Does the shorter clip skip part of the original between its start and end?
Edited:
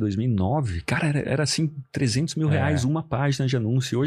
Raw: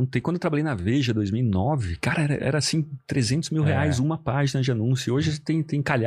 no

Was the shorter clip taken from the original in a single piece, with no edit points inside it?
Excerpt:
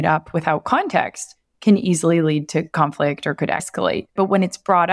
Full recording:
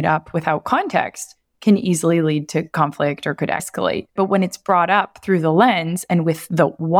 yes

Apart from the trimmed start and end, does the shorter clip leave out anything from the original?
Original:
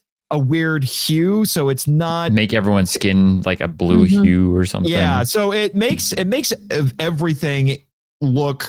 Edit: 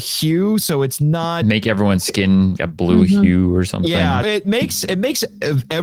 yes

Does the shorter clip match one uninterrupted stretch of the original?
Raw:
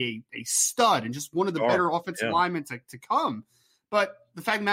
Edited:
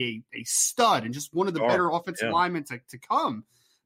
yes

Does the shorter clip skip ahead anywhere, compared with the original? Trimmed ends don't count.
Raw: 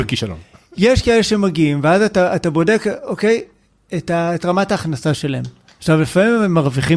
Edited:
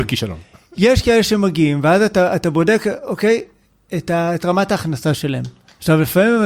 no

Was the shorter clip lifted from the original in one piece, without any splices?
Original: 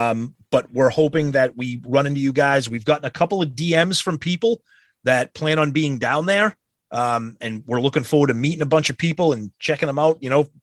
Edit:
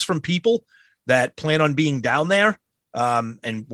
yes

